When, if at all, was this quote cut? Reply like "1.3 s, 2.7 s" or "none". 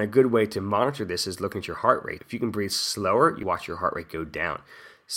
2.2 s, 3.4 s